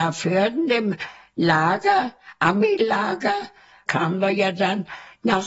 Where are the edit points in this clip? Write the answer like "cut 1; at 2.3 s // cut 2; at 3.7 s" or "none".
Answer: cut 1; at 3.9 s